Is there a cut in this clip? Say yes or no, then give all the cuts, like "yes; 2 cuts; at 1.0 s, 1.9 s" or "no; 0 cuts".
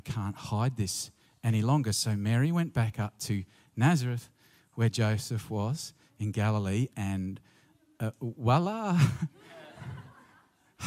no; 0 cuts